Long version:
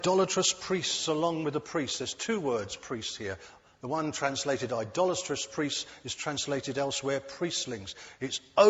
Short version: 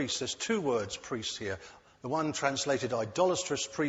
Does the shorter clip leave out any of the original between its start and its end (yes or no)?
no